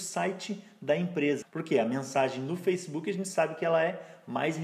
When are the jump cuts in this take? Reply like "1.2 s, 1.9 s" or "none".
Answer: 1.4 s